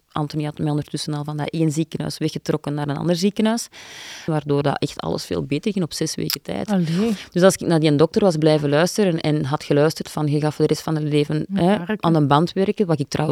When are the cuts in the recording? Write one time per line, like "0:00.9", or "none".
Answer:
0:04.3